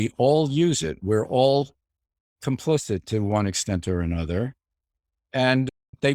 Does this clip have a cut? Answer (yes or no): no